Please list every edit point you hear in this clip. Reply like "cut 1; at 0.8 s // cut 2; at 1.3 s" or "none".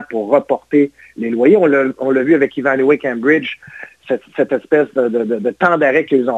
none